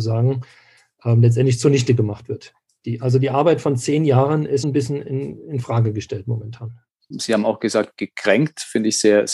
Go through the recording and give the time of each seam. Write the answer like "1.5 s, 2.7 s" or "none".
4.6 s, 7.1 s